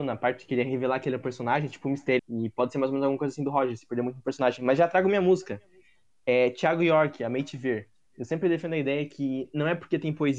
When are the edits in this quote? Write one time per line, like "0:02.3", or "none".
0:02.2